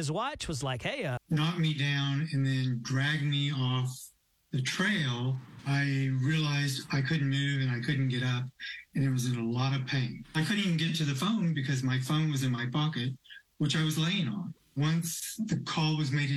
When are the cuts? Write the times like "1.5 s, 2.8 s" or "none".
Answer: 1.2 s